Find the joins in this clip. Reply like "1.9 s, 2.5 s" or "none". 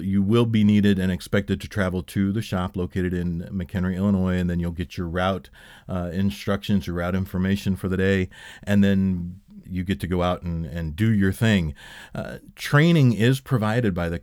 9.6 s